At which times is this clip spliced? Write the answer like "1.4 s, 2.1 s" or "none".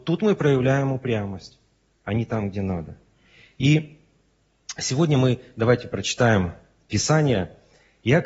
none